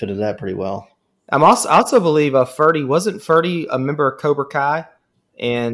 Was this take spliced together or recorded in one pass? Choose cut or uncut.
uncut